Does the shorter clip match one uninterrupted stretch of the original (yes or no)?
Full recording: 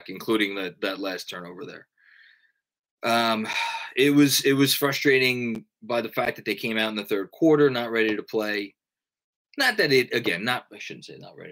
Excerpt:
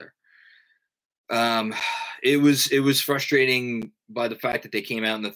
yes